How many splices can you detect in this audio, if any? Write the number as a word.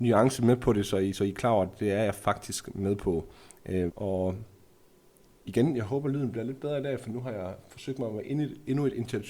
one